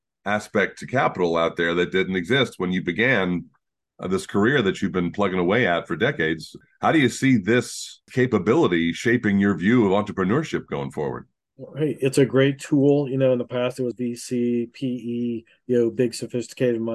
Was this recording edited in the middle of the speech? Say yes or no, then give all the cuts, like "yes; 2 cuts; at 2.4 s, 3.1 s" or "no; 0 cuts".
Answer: yes; 1 cut; at 13.9 s